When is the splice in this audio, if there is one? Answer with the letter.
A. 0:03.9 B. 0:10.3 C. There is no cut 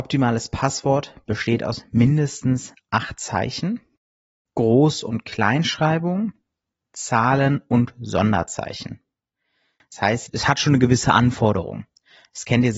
B